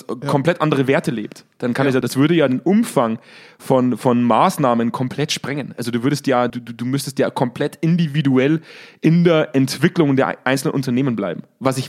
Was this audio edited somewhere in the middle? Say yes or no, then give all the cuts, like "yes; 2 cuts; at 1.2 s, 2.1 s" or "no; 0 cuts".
yes; 2 cuts; at 2.0 s, 6.5 s